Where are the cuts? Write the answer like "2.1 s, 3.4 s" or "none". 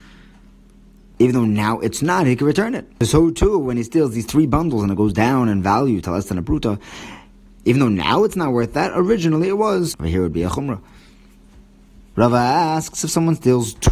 2.9 s, 9.9 s